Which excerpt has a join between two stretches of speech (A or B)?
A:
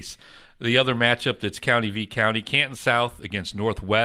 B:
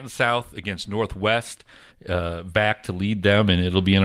B